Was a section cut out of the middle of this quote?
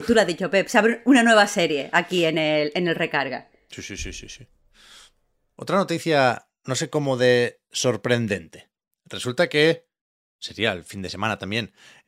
no; 0 cuts

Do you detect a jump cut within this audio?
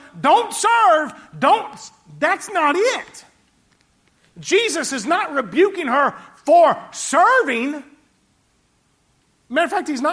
no; 0 cuts

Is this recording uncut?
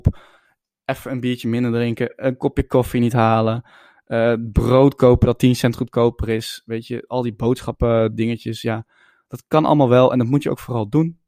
yes; 0 cuts

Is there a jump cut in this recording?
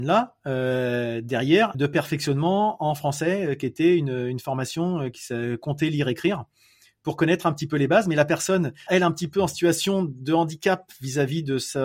yes; 2 cuts; at 1.7 s, 8.9 s

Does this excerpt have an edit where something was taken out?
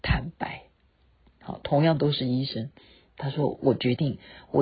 no; 0 cuts

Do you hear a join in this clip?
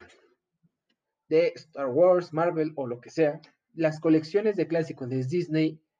yes; 1 cut; at 3.7 s

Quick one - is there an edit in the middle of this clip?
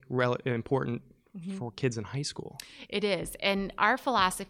no; 0 cuts

